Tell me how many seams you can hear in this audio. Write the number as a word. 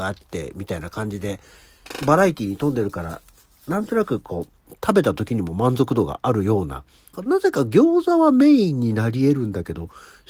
one